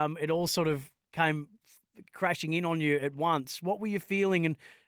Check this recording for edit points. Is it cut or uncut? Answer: uncut